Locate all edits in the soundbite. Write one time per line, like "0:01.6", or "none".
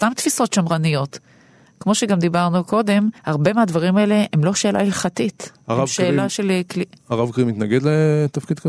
0:03.2